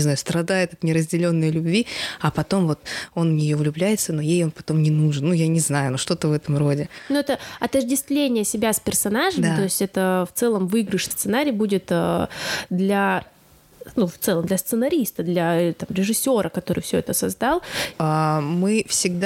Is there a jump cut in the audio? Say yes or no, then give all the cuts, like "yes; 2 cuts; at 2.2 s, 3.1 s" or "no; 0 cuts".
yes; 2 cuts; at 11.1 s, 17.9 s